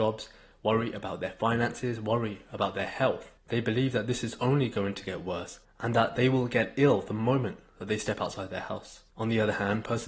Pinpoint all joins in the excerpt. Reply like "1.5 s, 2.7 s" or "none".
none